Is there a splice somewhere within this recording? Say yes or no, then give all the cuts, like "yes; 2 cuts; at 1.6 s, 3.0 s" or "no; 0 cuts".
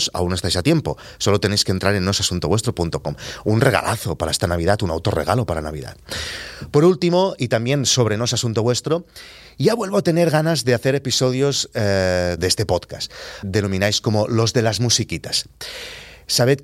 yes; 2 cuts; at 12.4 s, 13.4 s